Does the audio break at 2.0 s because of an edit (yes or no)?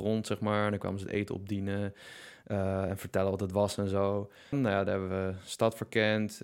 no